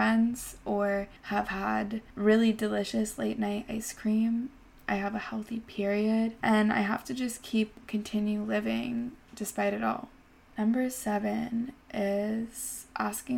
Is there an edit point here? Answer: no; 0 cuts

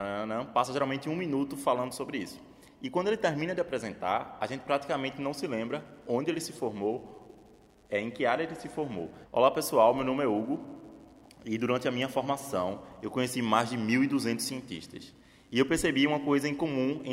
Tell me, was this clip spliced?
yes; 1 cut; at 9.3 s

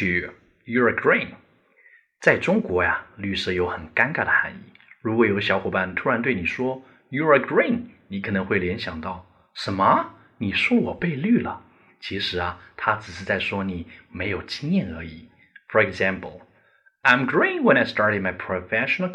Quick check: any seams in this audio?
no; 0 cuts

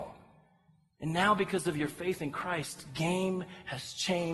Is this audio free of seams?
yes; 0 cuts

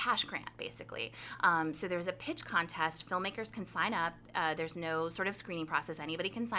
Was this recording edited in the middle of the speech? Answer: no; 0 cuts

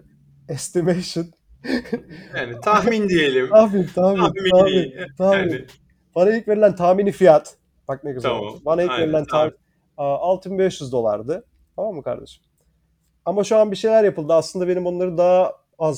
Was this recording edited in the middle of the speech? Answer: yes; 1 cut; at 9.5 s

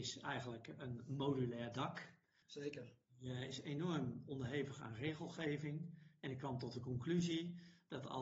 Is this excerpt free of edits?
no; 1 cut; at 2.4 s

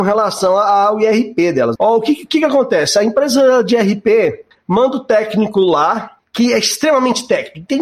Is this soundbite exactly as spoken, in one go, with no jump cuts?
no; 1 cut; at 1.8 s

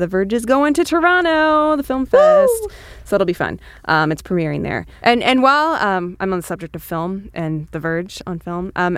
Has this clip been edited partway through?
no; 0 cuts

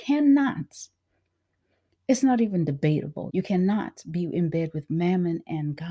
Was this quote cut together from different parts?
yes; 1 cut; at 3.3 s

